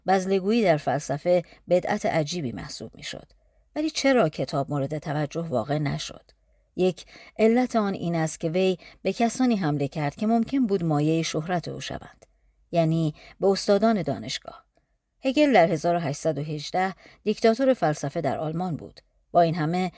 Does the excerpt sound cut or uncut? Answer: uncut